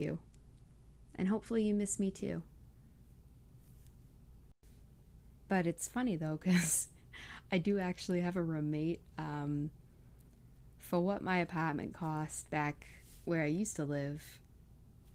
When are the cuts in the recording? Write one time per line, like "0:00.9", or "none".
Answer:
0:05.4